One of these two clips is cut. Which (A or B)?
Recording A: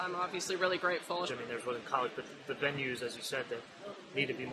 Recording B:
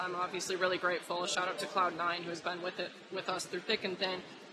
A